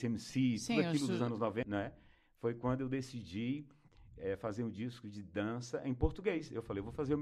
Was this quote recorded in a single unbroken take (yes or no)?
no